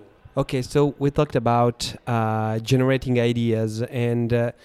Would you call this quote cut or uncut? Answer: uncut